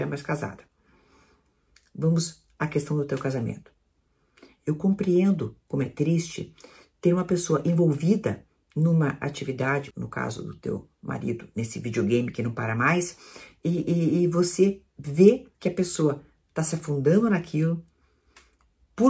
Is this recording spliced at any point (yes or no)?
yes